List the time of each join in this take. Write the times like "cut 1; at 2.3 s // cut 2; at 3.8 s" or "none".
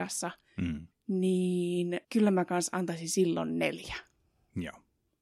cut 1; at 0.9 s // cut 2; at 2.0 s